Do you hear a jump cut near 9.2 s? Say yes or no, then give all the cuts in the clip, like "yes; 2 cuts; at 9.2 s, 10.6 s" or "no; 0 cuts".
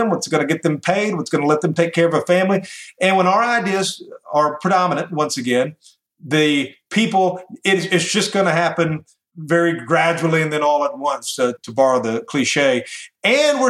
no; 0 cuts